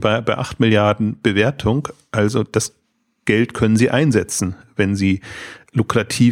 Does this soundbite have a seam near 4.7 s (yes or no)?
no